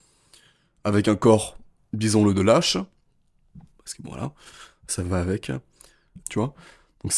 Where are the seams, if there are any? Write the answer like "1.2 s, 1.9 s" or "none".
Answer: 3.7 s, 6.2 s